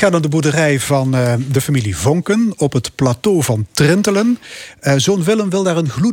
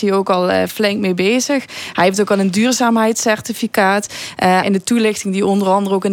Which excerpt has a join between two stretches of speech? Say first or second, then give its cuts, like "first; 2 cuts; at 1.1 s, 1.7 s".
second; 1 cut; at 4.6 s